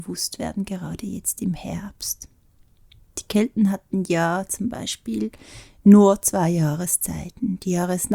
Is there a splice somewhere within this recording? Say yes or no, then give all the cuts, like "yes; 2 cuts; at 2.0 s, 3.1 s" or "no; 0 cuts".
no; 0 cuts